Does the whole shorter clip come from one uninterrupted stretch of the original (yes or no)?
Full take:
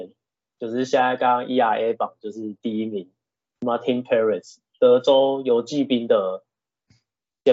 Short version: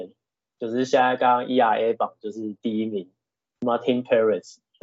yes